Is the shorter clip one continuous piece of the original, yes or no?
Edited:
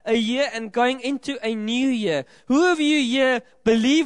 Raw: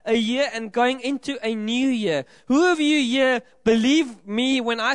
yes